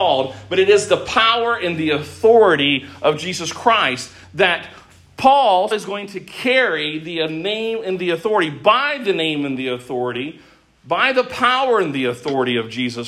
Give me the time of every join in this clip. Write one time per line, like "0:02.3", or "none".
0:05.7